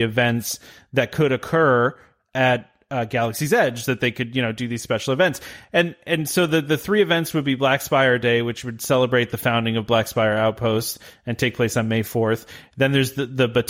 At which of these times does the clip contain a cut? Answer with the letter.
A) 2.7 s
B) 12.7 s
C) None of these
C